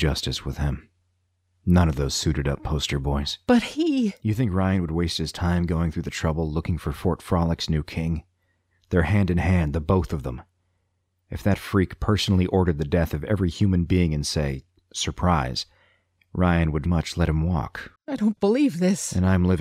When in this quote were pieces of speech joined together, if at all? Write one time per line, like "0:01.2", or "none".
0:16.9
0:18.0

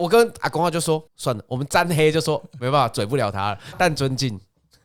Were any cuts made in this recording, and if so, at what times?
0:01.1
0:03.7

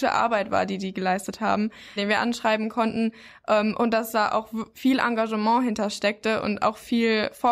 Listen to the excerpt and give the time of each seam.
0:02.0
0:04.7

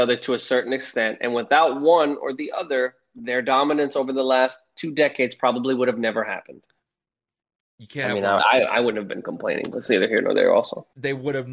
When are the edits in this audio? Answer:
0:08.4
0:09.7

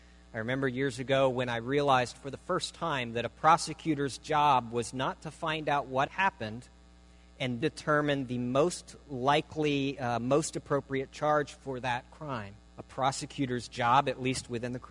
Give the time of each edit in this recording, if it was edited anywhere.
0:06.1
0:07.6
0:12.7

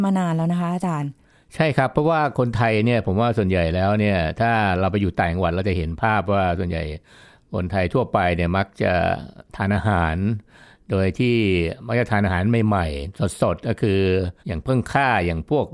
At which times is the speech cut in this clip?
0:14.4

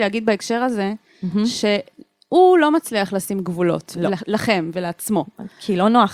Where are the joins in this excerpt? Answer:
none

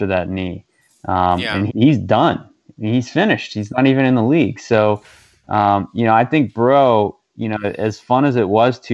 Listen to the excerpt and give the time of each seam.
0:01.7

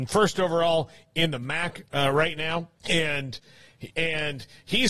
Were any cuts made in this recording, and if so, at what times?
0:02.8
0:03.9

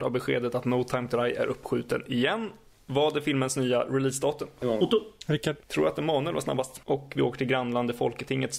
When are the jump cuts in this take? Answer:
0:05.6
0:06.8

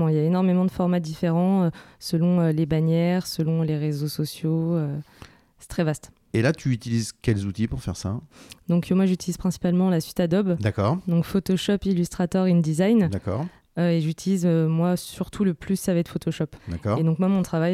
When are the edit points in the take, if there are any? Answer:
0:16.6

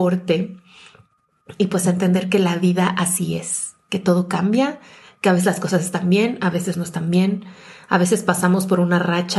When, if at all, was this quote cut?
none

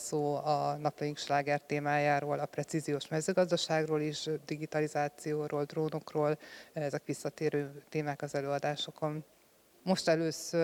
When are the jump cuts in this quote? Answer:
0:09.7

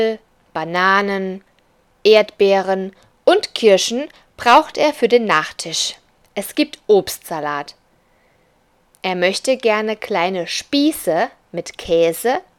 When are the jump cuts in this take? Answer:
0:08.8

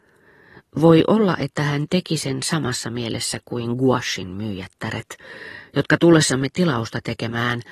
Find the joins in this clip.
none

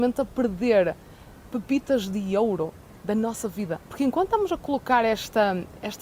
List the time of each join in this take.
0:03.9

